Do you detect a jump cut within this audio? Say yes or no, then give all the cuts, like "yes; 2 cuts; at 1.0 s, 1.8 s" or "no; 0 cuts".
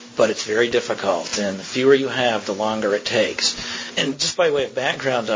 no; 0 cuts